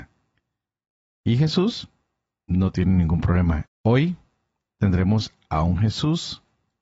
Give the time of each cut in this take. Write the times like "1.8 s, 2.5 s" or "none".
3.7 s

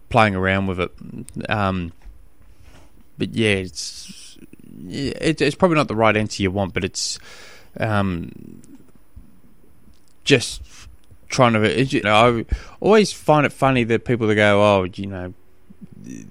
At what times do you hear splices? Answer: 12.0 s

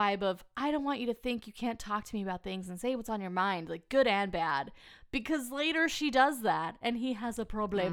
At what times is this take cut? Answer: none

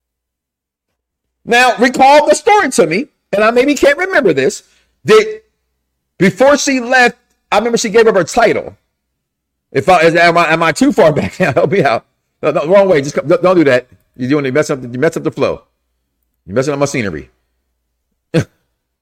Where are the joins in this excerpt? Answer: none

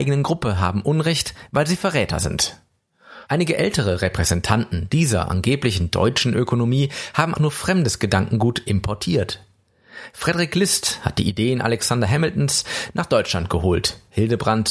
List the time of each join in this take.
3.3 s, 7.3 s

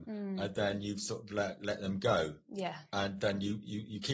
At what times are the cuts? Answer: none

